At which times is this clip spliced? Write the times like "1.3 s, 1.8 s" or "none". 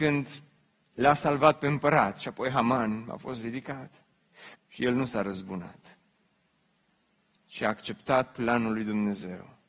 4.6 s

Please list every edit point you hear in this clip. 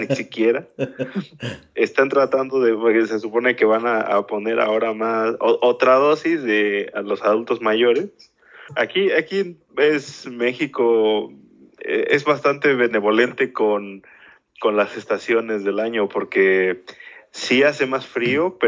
8.7 s

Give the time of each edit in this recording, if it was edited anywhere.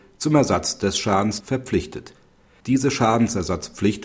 1.4 s

